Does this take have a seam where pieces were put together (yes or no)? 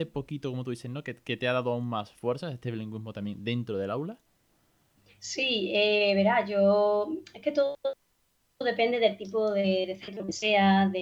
no